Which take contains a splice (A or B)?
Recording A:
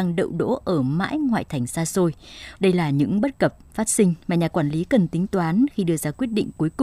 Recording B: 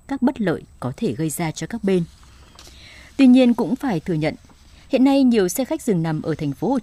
A